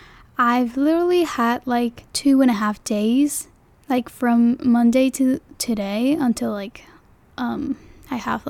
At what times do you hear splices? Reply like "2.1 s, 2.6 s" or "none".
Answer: 2.1 s